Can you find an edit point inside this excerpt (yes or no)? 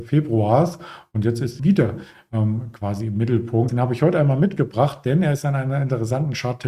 yes